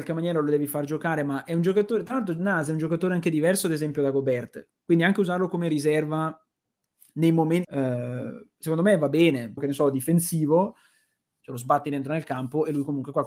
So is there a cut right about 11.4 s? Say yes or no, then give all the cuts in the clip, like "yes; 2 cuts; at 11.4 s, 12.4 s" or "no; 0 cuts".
yes; 3 cuts; at 7.6 s, 9.6 s, 11.4 s